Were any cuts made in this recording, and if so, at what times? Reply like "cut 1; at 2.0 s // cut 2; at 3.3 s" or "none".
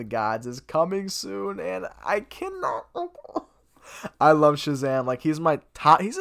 none